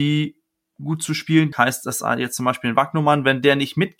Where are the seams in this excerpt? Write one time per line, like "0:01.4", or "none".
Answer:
0:01.5